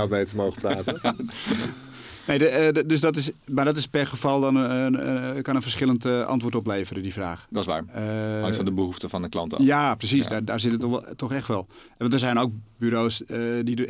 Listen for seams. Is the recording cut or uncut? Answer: uncut